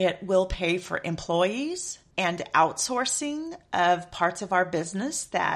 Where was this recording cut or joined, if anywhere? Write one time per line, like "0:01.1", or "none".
0:02.1